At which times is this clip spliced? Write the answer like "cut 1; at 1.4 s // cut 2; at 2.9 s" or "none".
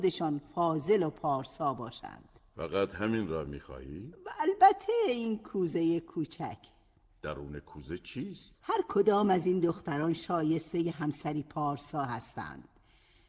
cut 1; at 8.5 s